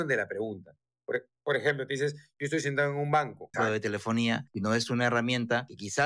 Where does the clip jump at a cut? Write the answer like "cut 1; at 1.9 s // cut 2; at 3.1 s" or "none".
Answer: cut 1; at 3.5 s